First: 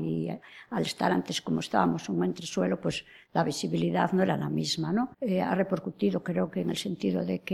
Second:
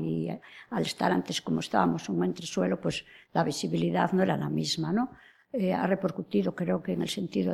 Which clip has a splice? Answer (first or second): first